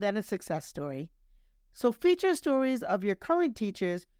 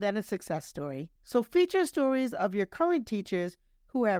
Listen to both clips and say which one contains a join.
second; 1 cut; at 1.2 s

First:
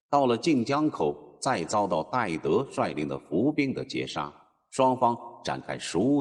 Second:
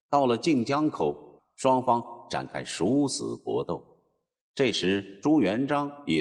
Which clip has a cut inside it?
second; 1 cut; at 1.4 s

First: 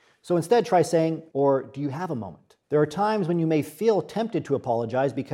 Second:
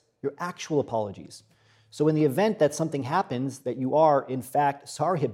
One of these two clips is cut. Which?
first; 2 cuts; at 1.3 s, 2.6 s

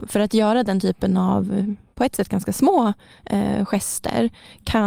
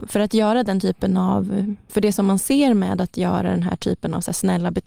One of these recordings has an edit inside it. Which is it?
second; 1 cut; at 1.9 s

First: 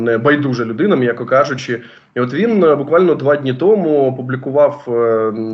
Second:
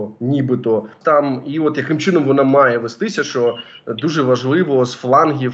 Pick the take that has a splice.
second; 1 cut; at 1.0 s

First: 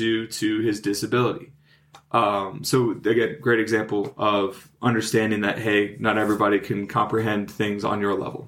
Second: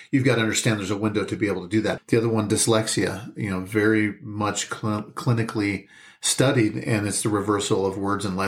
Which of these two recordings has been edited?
second; 1 cut; at 2.0 s

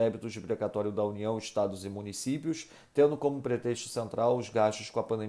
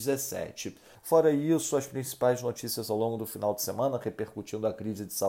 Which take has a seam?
second; 1 cut; at 1.0 s

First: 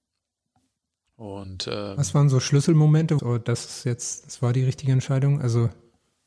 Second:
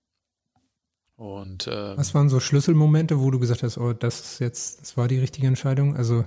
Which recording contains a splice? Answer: first; 1 cut; at 3.2 s

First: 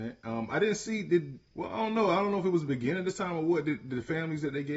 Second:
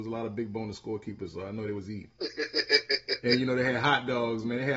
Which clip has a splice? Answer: first; 1 cut; at 1.5 s

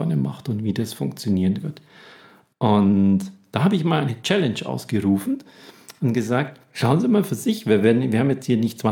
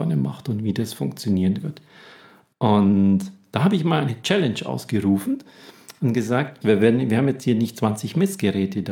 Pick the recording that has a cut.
second; 1 cut; at 6.6 s

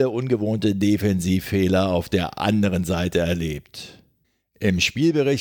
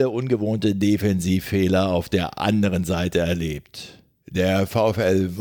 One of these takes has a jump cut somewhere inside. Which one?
second; 1 cut; at 4.2 s

